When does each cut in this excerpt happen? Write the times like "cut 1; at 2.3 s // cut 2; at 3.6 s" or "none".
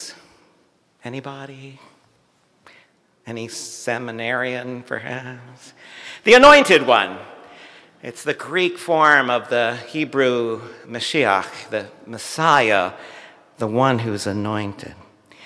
none